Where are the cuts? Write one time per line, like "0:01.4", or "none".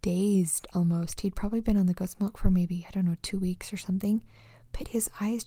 none